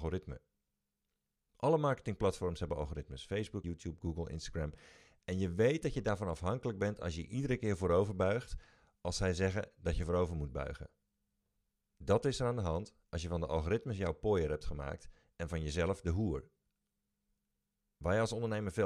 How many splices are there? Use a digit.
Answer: 1